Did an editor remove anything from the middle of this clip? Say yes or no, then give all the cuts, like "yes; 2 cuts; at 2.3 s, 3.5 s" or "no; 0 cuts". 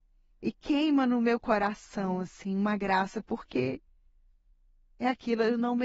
no; 0 cuts